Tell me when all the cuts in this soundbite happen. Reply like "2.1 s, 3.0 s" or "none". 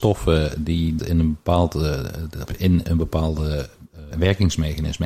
1.0 s, 2.5 s, 4.1 s